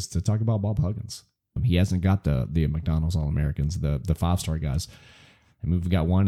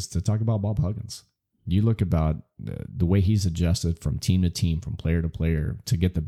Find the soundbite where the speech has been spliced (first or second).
first